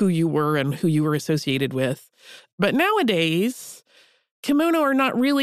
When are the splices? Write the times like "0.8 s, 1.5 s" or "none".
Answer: none